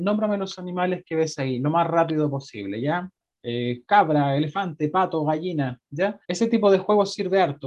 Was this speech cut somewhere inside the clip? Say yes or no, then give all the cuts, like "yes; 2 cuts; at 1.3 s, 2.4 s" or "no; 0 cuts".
yes; 2 cuts; at 3.3 s, 6.2 s